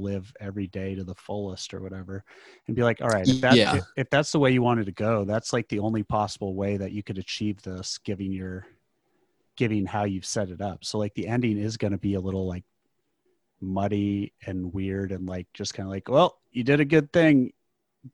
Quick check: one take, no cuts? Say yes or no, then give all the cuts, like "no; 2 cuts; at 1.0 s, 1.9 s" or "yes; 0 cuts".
yes; 0 cuts